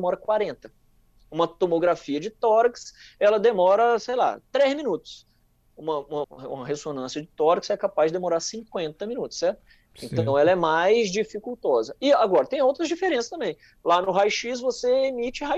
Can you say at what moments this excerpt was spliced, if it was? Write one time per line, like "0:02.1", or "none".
0:06.2